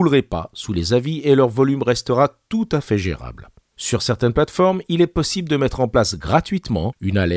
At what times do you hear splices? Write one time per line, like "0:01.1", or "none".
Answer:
0:03.7